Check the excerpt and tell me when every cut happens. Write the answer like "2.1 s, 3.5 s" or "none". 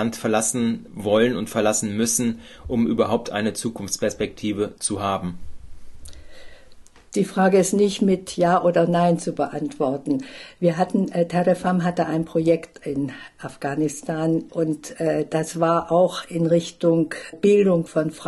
14.5 s, 17.3 s